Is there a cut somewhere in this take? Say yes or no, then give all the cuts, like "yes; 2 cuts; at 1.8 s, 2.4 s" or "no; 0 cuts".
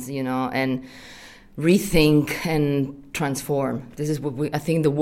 no; 0 cuts